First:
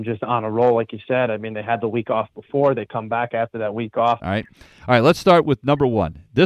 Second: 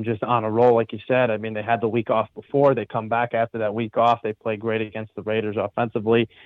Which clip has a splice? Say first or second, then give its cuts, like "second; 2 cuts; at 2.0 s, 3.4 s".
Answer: first; 1 cut; at 4.2 s